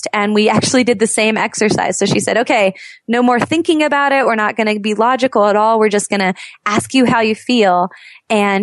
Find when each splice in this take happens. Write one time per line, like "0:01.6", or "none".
none